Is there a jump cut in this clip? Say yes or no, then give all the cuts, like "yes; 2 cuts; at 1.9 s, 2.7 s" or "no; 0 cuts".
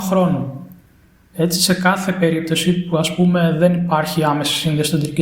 no; 0 cuts